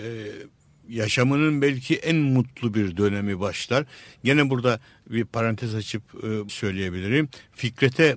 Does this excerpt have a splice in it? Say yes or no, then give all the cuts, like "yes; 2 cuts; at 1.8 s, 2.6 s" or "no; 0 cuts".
yes; 1 cut; at 6.5 s